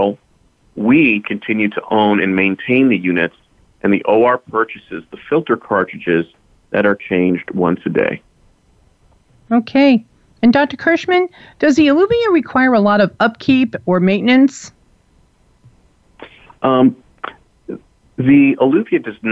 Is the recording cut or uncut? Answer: uncut